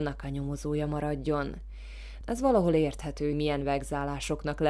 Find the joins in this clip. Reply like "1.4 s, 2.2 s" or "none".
2.2 s, 3.3 s